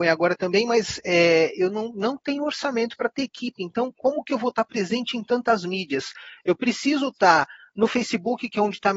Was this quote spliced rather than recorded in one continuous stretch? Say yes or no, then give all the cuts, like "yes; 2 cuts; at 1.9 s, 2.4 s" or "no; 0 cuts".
no; 0 cuts